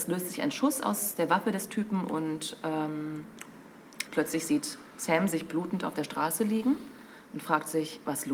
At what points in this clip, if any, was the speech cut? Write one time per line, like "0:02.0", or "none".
0:04.1